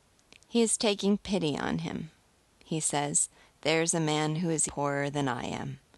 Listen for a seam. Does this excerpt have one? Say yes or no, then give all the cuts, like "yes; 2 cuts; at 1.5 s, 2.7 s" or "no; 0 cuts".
yes; 1 cut; at 4.7 s